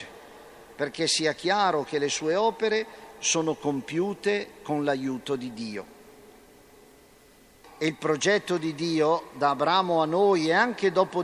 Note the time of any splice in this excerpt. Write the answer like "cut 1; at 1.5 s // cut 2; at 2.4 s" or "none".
cut 1; at 7.6 s